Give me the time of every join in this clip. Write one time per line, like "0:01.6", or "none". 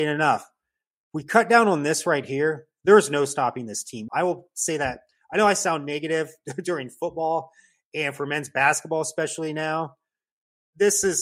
0:04.1